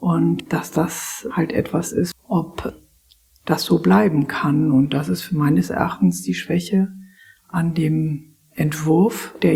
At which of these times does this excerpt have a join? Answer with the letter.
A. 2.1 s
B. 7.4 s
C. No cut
A